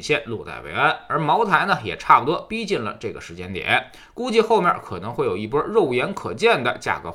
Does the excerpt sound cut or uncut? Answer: uncut